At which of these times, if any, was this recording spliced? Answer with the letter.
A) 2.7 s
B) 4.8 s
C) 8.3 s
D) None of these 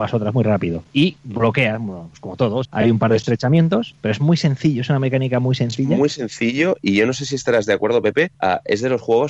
A